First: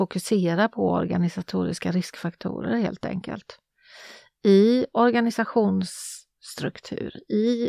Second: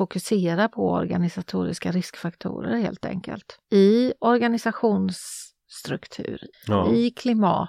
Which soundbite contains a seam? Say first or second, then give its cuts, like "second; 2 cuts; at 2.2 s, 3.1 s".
second; 2 cuts; at 3.6 s, 6.5 s